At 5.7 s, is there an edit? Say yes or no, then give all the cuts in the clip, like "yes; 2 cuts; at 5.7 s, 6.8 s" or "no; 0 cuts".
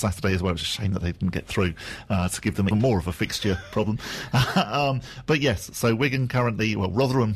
no; 1 cut; at 2.7 s